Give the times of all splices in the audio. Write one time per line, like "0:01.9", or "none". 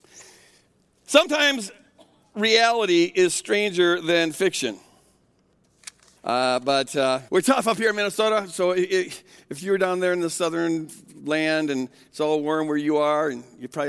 0:06.2
0:07.3